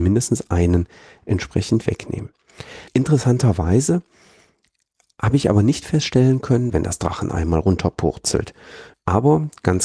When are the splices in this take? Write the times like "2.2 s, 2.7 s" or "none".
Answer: 2.9 s, 6.7 s, 8.9 s